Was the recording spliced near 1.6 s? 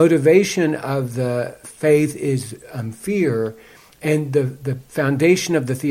yes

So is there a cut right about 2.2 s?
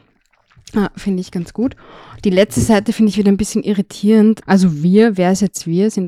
no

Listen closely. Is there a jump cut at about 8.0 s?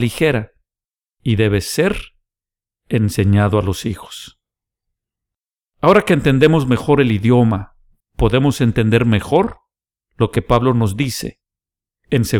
yes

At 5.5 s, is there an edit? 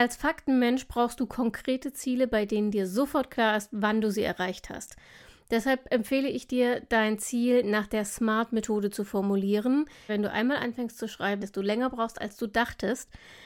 no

